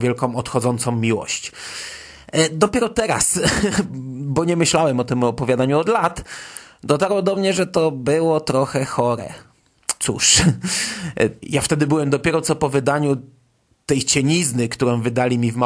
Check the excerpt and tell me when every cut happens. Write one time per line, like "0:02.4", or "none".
0:10.0
0:11.4